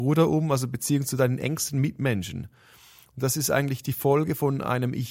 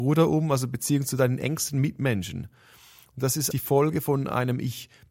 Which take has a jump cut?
second; 1 cut; at 3.5 s

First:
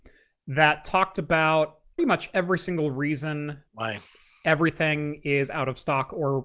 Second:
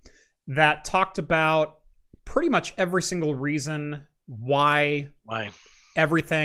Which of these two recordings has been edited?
first; 2 cuts; at 2.0 s, 3.7 s

